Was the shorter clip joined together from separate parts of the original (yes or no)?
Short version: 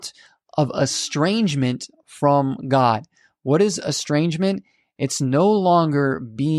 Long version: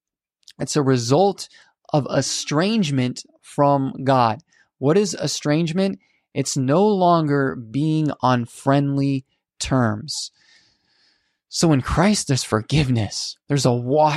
no